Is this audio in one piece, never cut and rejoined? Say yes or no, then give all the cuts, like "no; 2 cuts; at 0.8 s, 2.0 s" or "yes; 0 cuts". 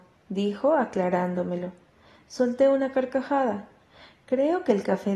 yes; 0 cuts